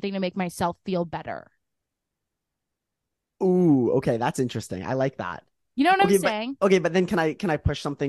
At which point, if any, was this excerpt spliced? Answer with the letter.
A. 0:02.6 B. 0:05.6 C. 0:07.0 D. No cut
D